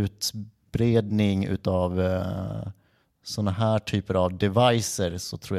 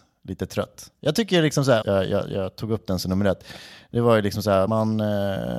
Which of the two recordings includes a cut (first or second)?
second